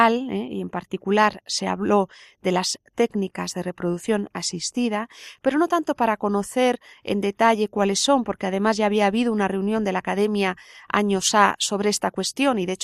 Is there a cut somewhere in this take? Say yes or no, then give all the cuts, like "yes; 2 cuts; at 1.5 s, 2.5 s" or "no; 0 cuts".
no; 0 cuts